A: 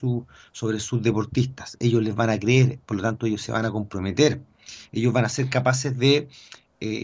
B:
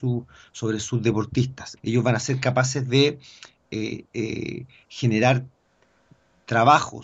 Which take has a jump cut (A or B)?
B